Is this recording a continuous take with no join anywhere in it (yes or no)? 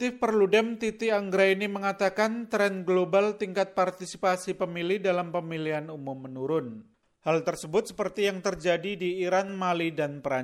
yes